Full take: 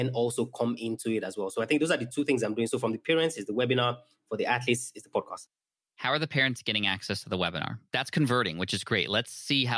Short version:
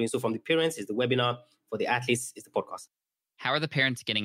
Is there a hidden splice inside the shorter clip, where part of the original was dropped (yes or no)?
no